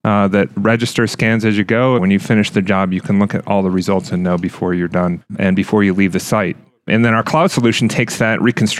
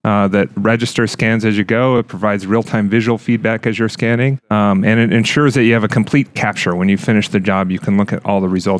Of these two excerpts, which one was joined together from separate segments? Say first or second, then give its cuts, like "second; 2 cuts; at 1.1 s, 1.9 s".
first; 1 cut; at 2.0 s